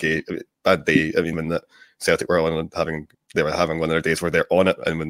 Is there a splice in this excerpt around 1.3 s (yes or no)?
yes